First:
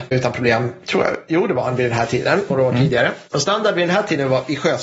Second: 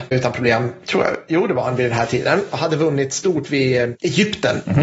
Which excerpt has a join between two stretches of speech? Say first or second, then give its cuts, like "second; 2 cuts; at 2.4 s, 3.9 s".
first; 1 cut; at 2.5 s